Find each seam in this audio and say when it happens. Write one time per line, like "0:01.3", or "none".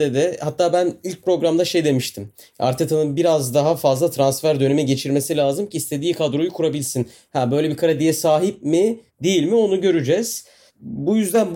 none